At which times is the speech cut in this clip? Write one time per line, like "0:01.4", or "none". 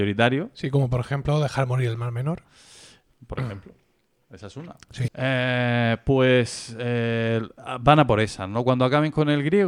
0:05.1